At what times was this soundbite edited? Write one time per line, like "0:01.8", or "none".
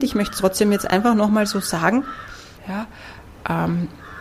0:02.6